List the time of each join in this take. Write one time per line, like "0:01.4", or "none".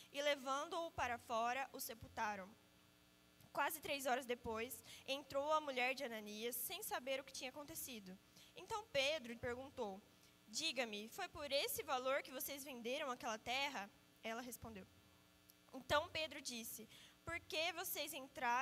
0:09.4
0:14.1